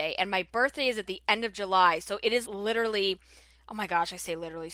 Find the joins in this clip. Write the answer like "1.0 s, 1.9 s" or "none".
2.4 s